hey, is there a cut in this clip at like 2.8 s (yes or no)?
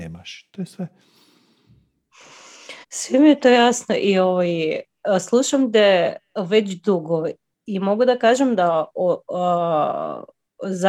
yes